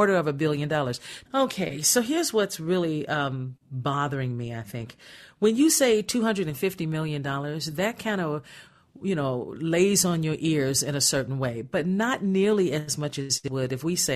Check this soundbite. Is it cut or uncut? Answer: cut